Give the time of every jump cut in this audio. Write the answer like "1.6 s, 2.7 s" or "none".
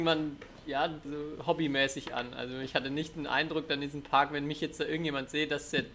1.0 s